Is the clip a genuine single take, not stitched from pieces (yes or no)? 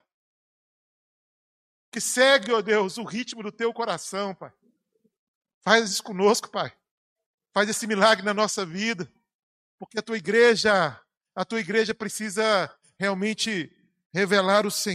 yes